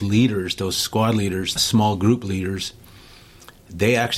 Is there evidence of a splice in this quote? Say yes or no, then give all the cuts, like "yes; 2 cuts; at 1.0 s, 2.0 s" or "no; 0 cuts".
yes; 1 cut; at 1.6 s